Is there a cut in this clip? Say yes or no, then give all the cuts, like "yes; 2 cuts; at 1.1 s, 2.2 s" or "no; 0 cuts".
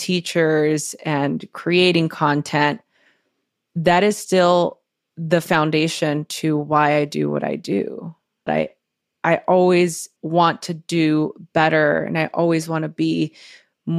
yes; 2 cuts; at 8.5 s, 10.2 s